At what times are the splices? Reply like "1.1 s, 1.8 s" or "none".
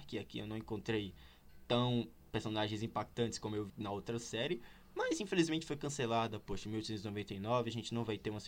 3.7 s